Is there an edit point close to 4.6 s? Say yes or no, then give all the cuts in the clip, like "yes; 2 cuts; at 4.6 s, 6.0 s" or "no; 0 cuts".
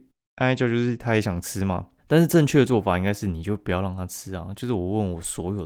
no; 1 cut; at 2.0 s